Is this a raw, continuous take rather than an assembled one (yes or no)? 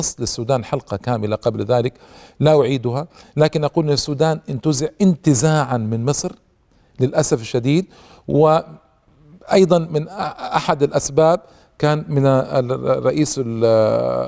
yes